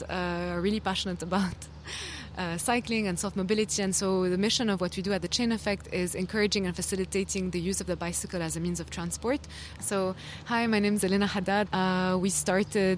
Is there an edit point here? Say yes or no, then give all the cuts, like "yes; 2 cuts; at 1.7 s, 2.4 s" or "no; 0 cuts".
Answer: yes; 2 cuts; at 9.8 s, 11.7 s